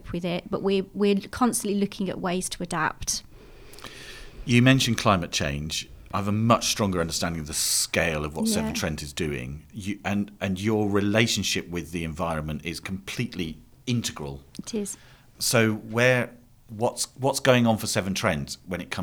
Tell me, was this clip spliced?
no; 0 cuts

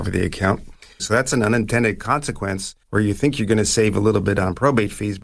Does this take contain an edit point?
yes; 2 cuts; at 1.0 s, 2.8 s

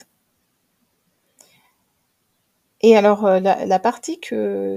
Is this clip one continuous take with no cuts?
yes; 0 cuts

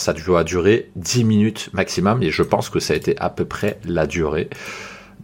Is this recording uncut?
yes; 0 cuts

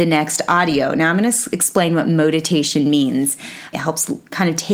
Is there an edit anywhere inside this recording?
yes; 1 cut; at 3.7 s

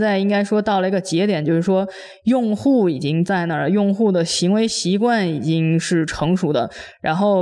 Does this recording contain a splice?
no; 0 cuts

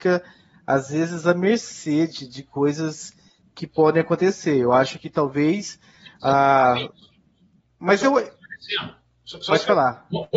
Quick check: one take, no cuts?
yes; 0 cuts

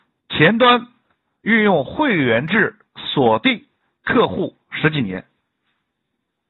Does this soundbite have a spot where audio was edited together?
no; 0 cuts

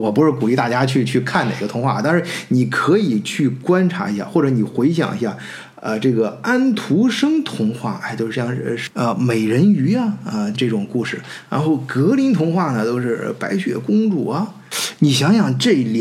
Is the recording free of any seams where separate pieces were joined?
no; 1 cut; at 10.5 s

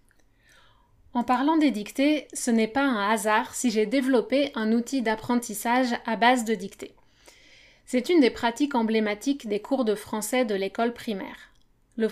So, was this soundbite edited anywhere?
no; 0 cuts

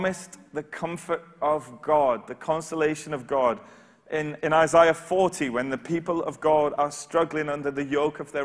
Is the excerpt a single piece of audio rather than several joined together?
yes; 0 cuts

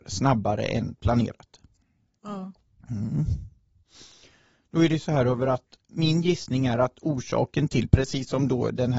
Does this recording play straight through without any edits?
yes; 0 cuts

